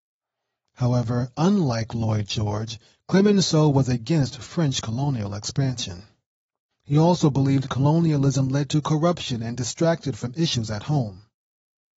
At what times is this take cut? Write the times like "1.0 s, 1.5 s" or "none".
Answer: 6.7 s

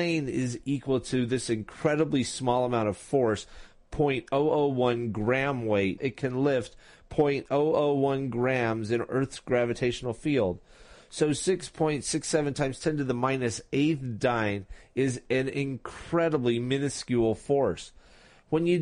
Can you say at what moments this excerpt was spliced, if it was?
6.0 s

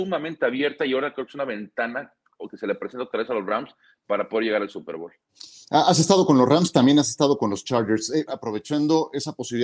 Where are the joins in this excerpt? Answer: 8.3 s

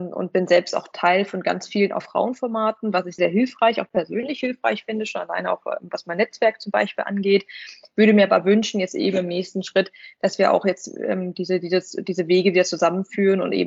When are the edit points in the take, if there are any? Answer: 3.2 s

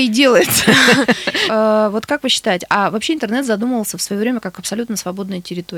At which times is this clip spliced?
1.5 s

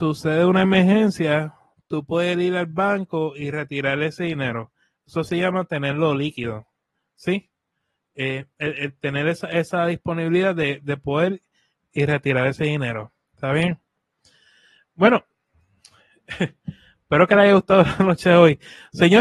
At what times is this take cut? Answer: none

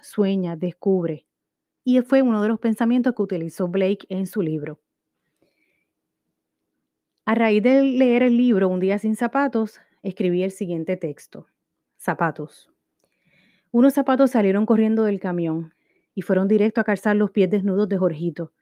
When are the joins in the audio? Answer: 1.8 s

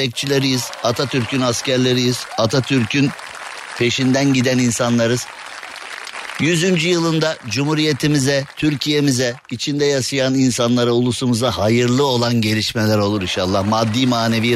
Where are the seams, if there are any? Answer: none

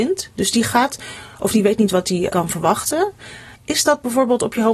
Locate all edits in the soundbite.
2.3 s, 3.5 s

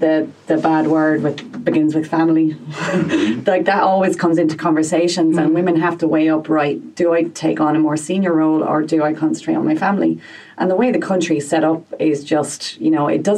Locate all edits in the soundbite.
none

